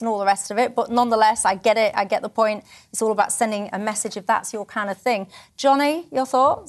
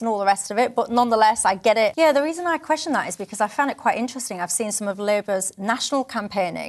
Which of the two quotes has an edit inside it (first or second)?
second